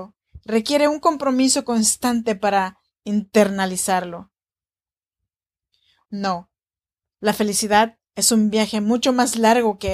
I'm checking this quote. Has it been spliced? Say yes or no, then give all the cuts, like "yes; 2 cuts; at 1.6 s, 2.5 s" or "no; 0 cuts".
yes; 2 cuts; at 6.1 s, 8.1 s